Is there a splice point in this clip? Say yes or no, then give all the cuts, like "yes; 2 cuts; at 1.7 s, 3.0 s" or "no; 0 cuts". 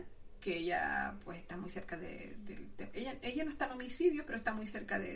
no; 0 cuts